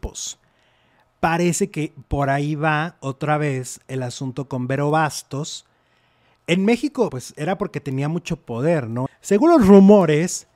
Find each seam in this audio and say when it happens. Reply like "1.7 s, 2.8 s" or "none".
7.1 s, 9.1 s